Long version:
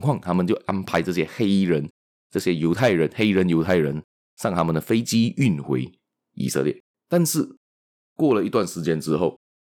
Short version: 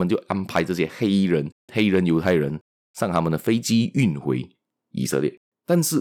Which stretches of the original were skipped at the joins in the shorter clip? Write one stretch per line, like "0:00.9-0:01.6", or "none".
0:02.1-0:03.1